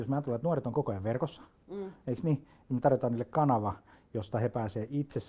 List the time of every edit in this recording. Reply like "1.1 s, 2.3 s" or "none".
none